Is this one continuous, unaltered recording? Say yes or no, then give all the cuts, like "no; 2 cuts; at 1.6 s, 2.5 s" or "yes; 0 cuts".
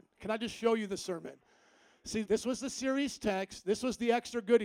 no; 1 cut; at 2.3 s